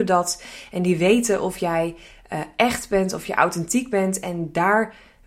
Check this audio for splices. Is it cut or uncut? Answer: uncut